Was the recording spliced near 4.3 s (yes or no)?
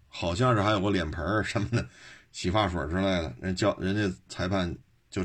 yes